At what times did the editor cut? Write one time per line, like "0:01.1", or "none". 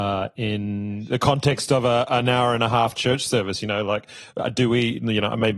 none